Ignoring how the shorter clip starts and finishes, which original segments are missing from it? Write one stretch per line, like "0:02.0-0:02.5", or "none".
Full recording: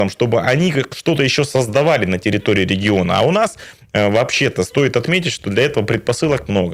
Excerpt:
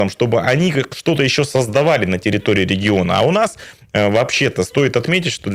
none